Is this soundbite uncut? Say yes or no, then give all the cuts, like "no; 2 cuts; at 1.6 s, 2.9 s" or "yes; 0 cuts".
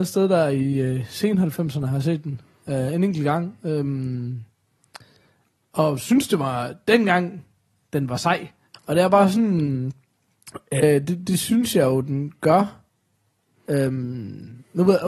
no; 1 cut; at 8.7 s